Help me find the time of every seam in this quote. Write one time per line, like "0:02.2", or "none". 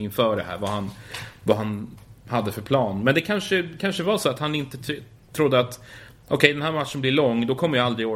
none